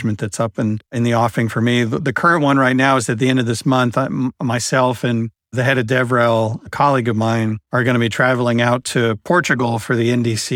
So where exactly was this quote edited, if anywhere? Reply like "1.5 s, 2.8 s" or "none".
7.6 s

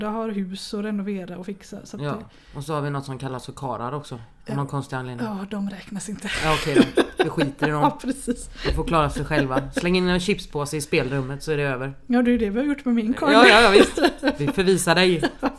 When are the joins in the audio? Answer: none

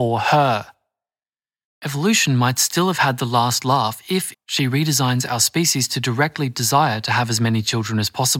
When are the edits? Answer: 1.7 s, 4.3 s

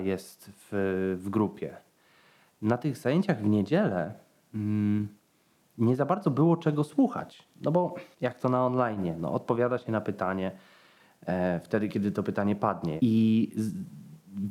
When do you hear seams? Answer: 8.1 s, 13.0 s

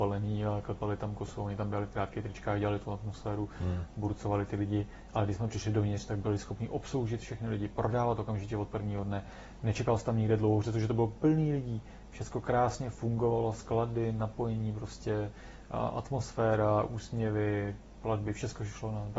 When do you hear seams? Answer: none

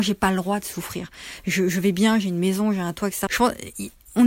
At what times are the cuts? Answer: 3.3 s

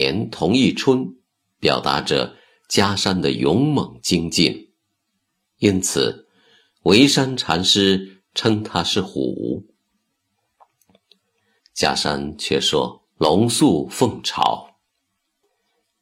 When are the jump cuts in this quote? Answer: 11.6 s, 13.1 s

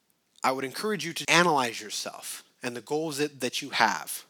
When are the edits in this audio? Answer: 1.2 s

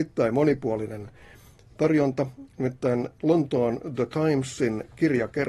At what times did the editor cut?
none

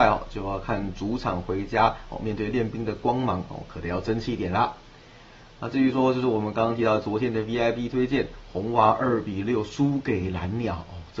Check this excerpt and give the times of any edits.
none

